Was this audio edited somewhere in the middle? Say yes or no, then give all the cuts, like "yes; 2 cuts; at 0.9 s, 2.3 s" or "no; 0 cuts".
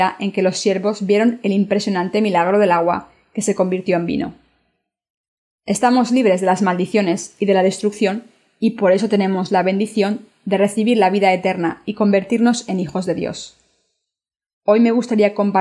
no; 0 cuts